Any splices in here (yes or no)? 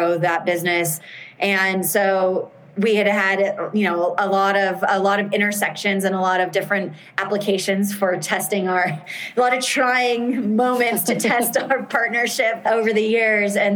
no